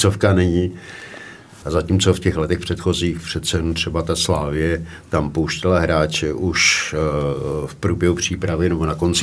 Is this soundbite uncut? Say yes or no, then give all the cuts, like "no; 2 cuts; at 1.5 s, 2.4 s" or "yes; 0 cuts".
no; 1 cut; at 1.6 s